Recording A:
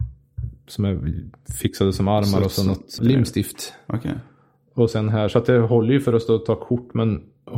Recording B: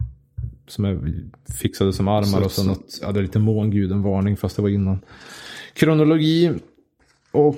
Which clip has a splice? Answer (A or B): A